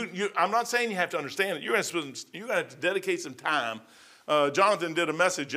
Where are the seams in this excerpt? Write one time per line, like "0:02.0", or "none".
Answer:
none